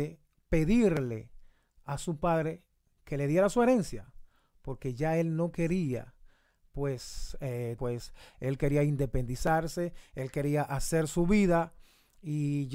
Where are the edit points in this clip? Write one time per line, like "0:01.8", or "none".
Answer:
0:07.8